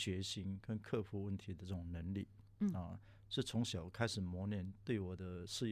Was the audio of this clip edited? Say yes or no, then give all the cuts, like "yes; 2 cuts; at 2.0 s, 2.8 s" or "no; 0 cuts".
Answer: no; 0 cuts